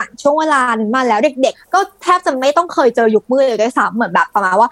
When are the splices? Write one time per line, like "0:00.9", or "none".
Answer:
0:01.5